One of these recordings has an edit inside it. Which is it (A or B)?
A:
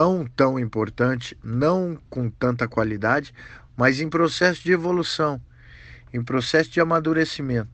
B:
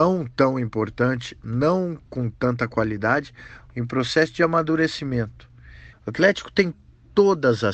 B